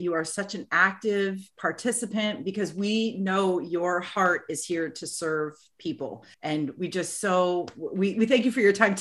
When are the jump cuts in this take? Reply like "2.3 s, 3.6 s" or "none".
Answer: 6.3 s